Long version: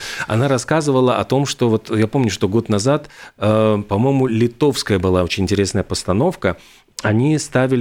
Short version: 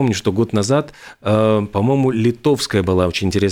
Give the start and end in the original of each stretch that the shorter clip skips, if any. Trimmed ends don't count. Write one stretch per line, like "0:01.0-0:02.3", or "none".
none